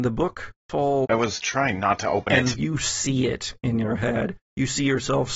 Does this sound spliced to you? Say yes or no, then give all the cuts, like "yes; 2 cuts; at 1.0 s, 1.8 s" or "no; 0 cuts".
yes; 3 cuts; at 1.0 s, 2.5 s, 4.4 s